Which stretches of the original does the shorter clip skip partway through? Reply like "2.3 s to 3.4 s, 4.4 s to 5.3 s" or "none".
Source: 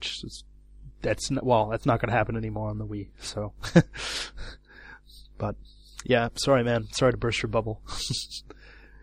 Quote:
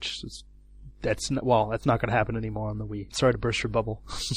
3.1 s to 6.9 s